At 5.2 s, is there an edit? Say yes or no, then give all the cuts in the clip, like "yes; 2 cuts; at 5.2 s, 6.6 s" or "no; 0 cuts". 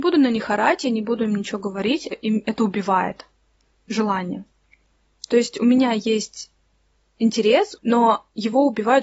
no; 2 cuts; at 2.1 s, 7.8 s